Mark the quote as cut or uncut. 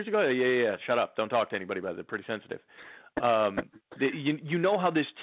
uncut